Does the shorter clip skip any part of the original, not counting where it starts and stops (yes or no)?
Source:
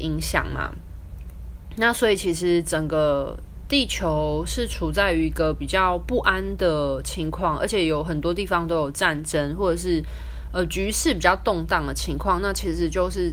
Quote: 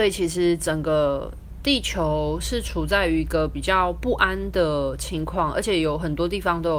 no